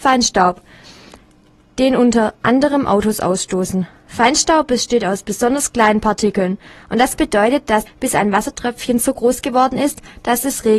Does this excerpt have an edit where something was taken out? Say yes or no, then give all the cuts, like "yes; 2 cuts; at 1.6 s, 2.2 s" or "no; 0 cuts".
yes; 1 cut; at 7.9 s